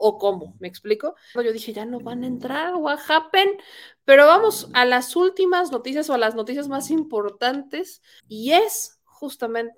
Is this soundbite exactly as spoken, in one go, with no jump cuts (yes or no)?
no